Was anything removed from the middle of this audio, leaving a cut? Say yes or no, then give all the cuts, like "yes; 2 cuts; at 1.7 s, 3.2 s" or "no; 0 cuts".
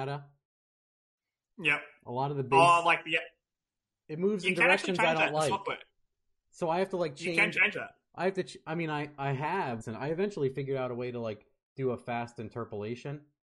yes; 1 cut; at 9.8 s